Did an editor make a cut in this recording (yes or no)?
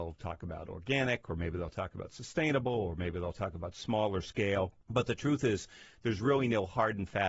no